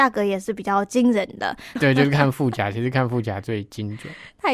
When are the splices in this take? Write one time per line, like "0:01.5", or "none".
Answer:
0:01.8